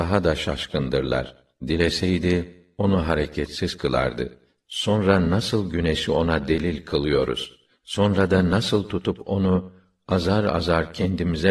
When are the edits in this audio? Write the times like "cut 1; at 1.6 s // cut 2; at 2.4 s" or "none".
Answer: cut 1; at 1.6 s